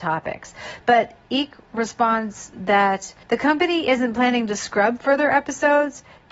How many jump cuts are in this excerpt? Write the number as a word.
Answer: one